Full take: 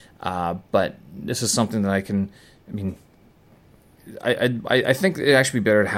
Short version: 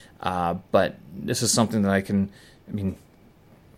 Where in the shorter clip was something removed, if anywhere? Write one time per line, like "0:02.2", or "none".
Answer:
none